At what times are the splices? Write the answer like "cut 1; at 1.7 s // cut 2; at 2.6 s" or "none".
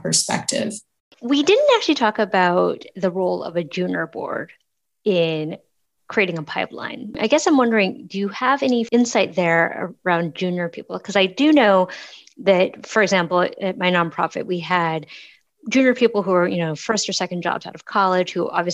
none